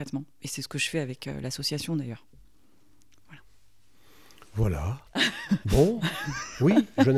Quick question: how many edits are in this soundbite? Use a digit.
0